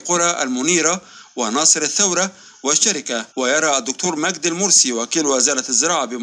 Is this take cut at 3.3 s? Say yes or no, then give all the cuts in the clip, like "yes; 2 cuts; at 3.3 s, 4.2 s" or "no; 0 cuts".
yes; 1 cut; at 3.3 s